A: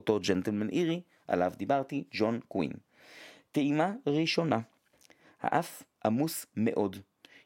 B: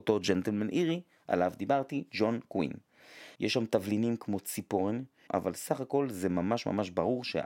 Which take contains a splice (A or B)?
B